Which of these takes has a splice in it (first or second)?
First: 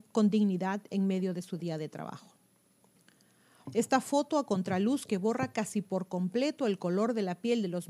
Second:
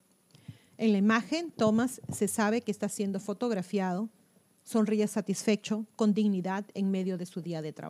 first